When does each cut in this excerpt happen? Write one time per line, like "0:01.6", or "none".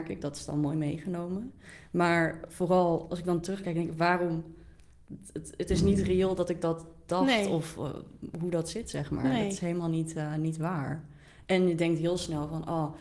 none